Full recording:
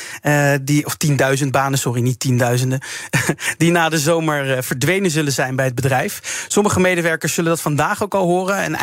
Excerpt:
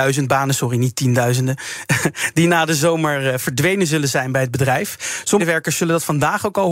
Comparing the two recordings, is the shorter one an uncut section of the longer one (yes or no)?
no